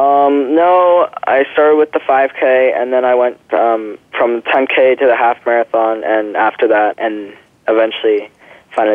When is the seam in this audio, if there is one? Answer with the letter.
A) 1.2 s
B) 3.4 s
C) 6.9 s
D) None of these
C